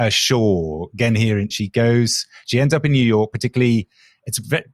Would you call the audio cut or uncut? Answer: cut